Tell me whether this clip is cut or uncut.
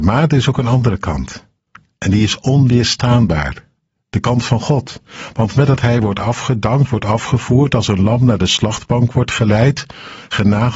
uncut